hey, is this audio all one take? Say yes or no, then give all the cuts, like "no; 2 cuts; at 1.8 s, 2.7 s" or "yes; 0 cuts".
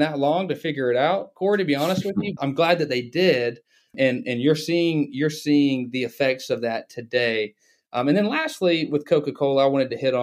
no; 1 cut; at 2.4 s